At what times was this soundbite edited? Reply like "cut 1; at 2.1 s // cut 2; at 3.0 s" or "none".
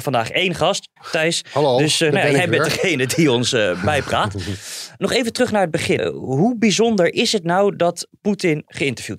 cut 1; at 1.0 s // cut 2; at 6.0 s